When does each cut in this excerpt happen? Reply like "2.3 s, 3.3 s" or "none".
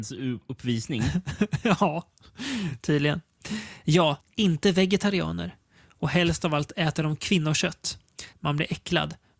4.2 s, 8.3 s